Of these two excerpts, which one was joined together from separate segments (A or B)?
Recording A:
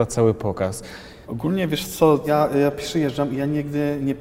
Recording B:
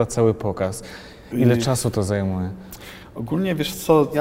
A